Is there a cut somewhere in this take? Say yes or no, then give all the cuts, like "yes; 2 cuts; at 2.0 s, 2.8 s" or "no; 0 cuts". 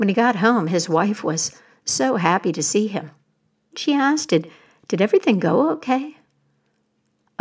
yes; 1 cut; at 3.7 s